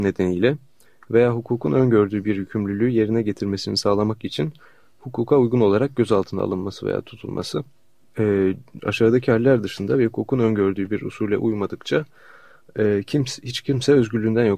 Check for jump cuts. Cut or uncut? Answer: cut